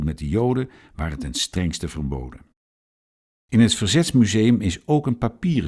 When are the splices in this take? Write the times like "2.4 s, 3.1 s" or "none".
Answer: 3.4 s